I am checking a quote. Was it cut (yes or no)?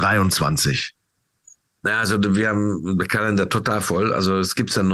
no